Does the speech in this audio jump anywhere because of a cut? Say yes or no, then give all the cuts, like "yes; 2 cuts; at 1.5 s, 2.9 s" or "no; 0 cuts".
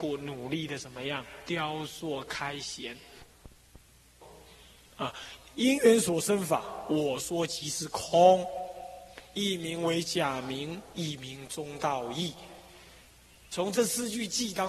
no; 0 cuts